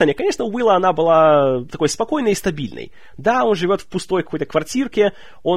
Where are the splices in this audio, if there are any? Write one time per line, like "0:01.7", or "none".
0:03.2